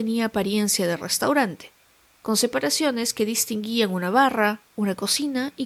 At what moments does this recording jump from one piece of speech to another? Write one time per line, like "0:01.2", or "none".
none